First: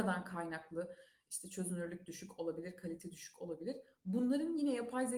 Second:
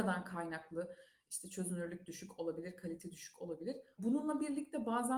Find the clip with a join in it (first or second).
second